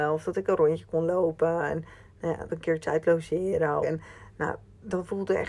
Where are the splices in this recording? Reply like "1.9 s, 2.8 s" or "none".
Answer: 2.5 s, 3.8 s